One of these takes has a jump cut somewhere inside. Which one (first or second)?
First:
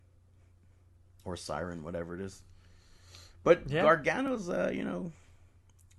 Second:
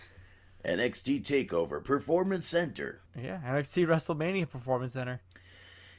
second